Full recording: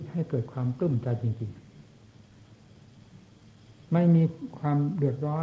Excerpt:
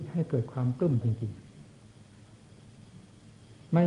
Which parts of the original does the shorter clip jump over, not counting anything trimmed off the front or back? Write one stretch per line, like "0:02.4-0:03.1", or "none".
0:01.0-0:01.2